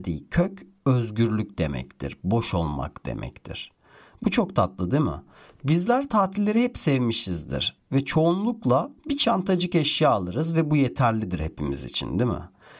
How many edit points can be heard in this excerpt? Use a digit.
2